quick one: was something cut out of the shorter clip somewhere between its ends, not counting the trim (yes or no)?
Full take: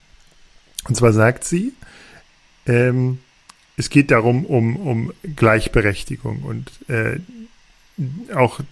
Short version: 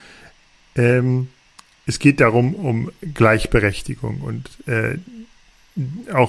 yes